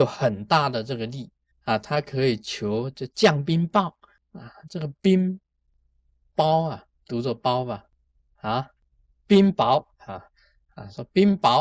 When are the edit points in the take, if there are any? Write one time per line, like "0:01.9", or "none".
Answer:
0:01.5